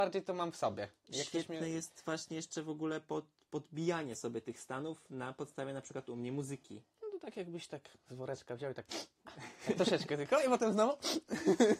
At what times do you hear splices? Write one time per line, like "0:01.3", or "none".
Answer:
0:06.9